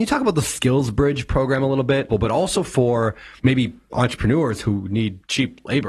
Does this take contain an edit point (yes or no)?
yes